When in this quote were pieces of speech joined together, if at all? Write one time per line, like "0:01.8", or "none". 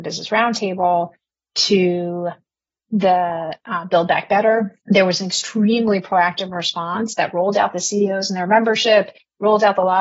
0:04.8